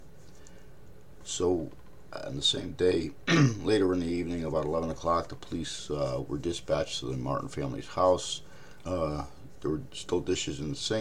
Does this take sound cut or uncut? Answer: cut